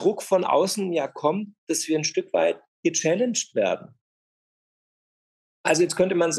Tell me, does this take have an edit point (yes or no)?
no